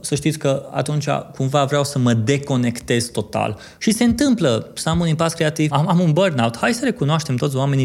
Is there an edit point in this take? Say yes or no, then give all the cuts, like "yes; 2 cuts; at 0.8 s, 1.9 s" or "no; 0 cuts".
yes; 2 cuts; at 3.8 s, 5.7 s